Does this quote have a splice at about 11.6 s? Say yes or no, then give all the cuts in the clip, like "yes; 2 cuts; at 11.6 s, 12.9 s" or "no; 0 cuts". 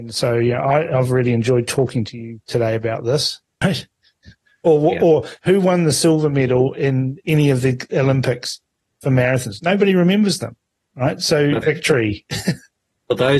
yes; 2 cuts; at 3.6 s, 11.6 s